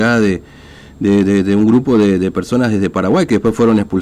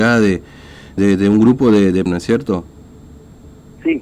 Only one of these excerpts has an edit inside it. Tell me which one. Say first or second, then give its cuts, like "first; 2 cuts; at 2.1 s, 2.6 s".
second; 2 cuts; at 1.0 s, 2.1 s